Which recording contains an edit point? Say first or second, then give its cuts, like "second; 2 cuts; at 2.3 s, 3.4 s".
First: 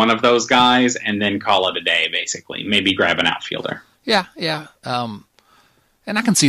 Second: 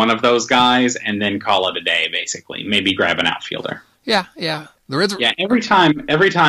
second; 1 cut; at 4.8 s